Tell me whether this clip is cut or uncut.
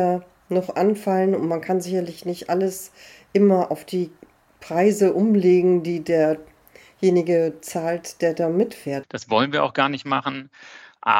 cut